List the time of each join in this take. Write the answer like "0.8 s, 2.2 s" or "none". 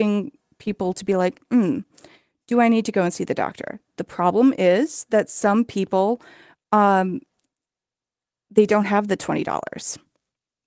none

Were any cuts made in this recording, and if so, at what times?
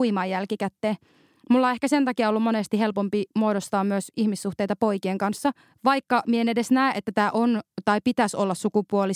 none

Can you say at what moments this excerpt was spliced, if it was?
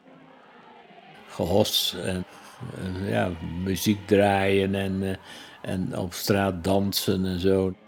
1.1 s

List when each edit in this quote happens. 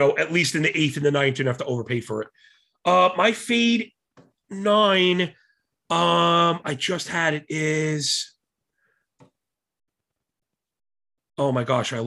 none

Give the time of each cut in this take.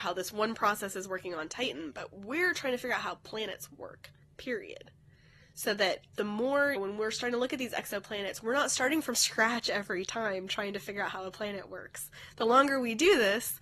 6.8 s

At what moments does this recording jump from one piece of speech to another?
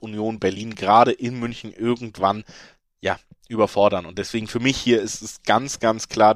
none

